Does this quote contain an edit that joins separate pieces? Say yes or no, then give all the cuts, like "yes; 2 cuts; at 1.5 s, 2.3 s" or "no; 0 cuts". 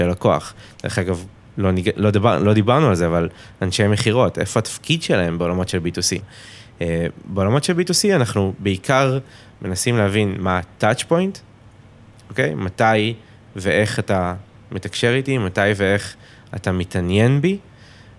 no; 0 cuts